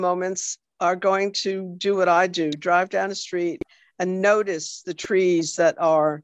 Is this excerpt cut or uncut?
uncut